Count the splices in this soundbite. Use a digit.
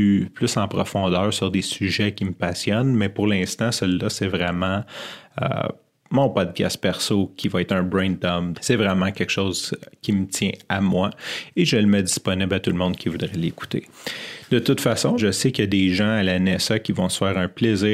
2